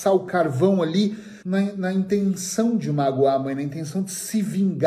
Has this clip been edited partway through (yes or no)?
yes